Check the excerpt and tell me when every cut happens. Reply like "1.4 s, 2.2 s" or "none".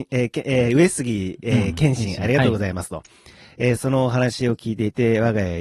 none

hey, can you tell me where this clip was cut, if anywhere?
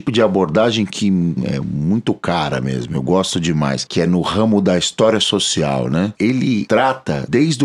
6.2 s

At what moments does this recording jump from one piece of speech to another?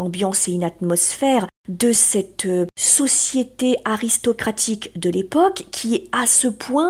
none

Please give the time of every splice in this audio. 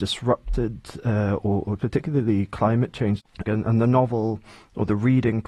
1.8 s, 3.5 s

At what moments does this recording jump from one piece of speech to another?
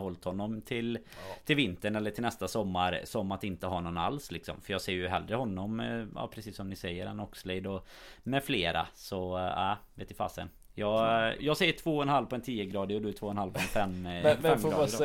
11.4 s

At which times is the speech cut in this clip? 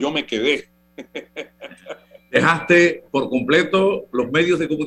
none

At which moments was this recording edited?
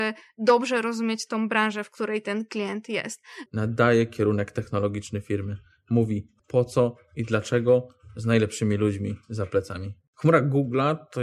3.5 s, 6.4 s

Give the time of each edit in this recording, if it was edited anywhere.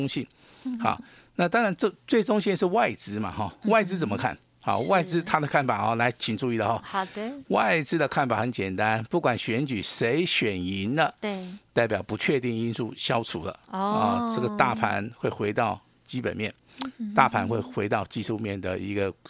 none

